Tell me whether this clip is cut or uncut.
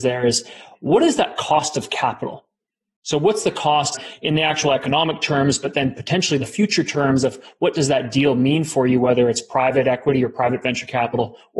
uncut